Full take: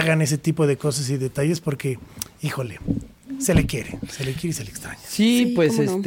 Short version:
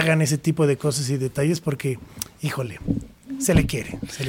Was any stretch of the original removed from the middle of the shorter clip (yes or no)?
no